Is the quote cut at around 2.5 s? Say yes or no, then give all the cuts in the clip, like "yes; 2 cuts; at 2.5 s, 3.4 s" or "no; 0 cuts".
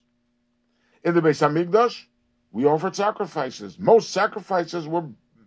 no; 1 cut; at 0.9 s